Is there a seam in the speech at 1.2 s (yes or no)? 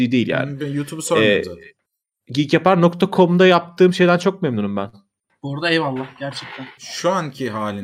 no